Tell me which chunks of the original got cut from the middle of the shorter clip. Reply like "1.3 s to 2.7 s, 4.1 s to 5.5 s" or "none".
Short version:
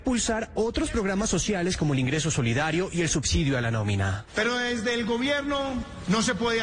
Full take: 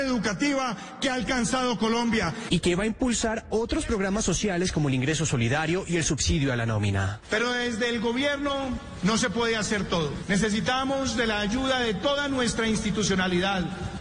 none